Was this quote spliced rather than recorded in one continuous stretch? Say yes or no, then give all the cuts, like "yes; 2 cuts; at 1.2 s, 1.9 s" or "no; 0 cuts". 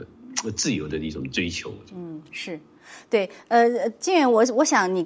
no; 0 cuts